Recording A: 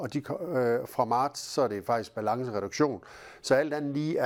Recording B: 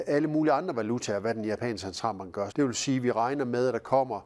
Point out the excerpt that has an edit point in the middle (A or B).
B